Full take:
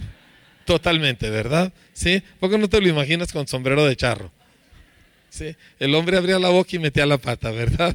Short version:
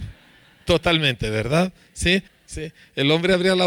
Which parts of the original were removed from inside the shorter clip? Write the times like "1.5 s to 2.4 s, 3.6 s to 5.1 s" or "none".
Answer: 2.3 s to 5.1 s